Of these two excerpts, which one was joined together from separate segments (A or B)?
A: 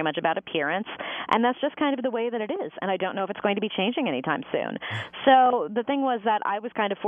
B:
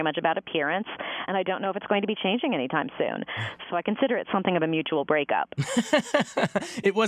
B